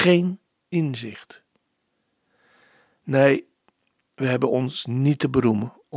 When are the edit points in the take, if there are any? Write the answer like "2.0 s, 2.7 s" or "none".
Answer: none